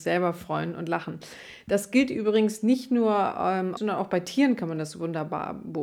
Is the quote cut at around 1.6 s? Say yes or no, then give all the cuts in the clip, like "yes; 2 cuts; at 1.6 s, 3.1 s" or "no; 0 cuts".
no; 1 cut; at 3.8 s